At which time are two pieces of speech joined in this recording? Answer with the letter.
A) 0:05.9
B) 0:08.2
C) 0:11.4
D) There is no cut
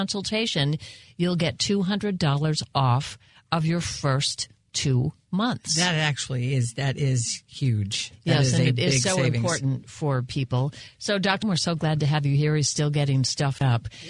C